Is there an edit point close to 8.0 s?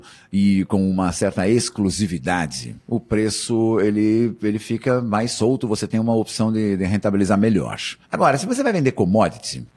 yes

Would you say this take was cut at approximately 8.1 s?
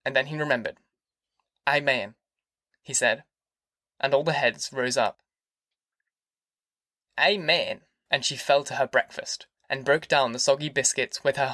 yes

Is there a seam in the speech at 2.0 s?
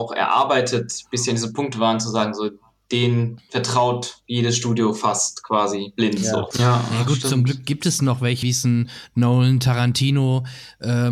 no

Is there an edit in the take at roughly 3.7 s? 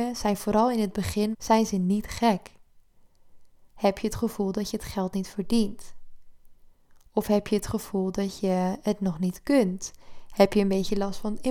yes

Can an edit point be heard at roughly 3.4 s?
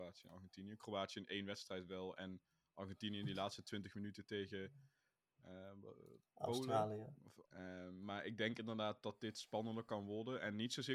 no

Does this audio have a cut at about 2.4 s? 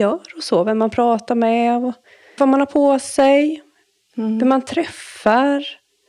yes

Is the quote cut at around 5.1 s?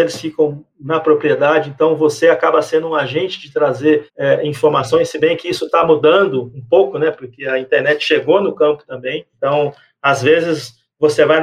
no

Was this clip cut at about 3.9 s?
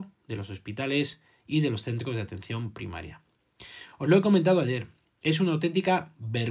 no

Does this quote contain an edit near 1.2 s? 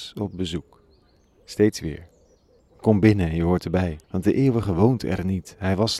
no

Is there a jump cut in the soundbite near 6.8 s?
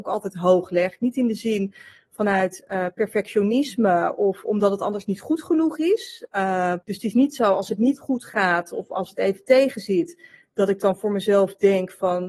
yes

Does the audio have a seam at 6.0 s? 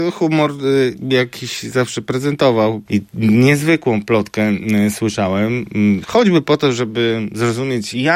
yes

